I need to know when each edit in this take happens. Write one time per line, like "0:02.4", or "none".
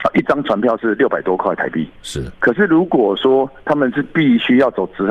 none